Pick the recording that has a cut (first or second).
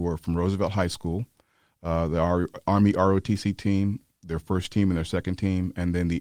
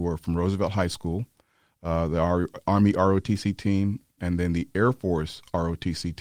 second